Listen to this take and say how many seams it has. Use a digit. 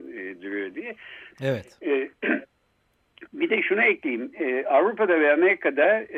1